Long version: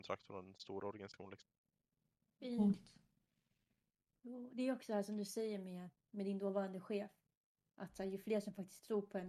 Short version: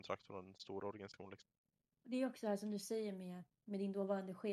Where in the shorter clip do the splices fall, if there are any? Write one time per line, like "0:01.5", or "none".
0:02.0